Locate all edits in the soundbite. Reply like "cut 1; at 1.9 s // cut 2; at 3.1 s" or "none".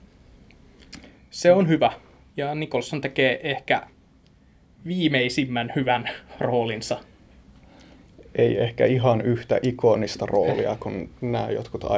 none